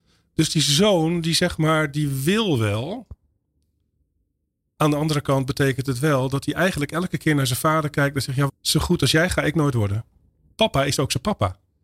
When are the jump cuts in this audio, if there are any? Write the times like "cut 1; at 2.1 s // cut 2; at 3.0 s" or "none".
cut 1; at 8.5 s // cut 2; at 10.5 s